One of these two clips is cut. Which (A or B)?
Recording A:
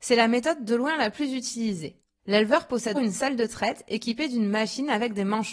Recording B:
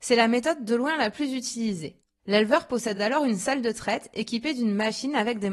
A